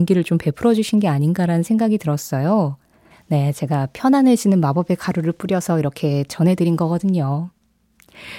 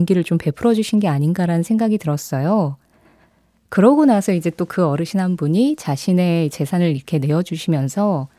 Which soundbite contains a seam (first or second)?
first